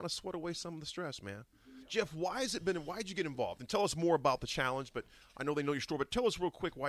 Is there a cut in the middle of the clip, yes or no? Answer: no